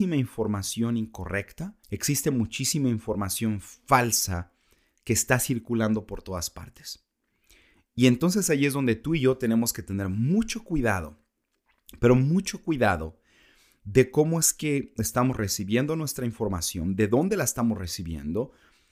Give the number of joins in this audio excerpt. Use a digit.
1